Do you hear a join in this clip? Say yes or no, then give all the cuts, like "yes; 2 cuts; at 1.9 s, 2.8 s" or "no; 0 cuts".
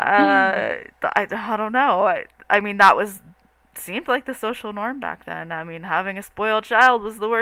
no; 0 cuts